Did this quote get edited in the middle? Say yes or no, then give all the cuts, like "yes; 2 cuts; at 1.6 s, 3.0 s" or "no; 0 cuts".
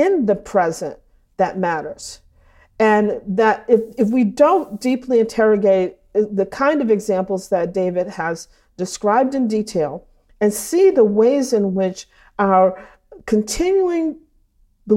no; 0 cuts